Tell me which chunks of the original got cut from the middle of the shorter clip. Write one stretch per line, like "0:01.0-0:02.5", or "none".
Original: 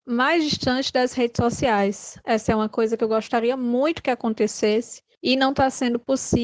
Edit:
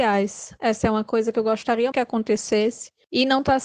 0:03.6-0:04.0